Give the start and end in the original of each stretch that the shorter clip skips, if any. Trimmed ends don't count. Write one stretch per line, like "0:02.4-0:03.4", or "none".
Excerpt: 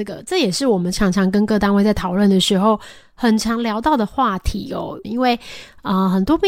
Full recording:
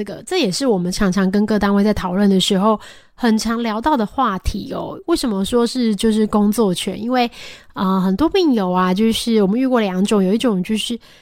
0:05.0-0:07.0